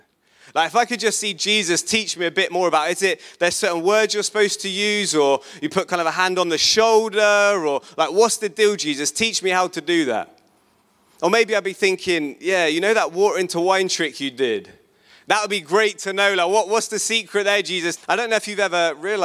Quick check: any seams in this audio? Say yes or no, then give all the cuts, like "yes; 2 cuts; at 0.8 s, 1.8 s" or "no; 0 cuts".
yes; 1 cut; at 18.0 s